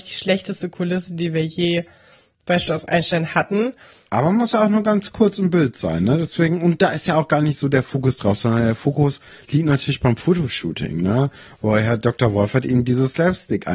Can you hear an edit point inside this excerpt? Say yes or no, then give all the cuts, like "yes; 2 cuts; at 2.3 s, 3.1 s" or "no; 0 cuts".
no; 0 cuts